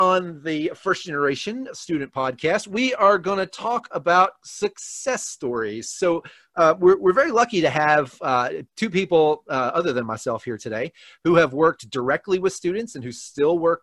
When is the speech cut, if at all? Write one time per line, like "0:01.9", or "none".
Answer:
none